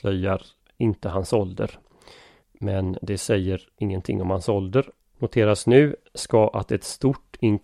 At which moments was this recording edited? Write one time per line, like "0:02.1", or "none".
0:02.4
0:05.0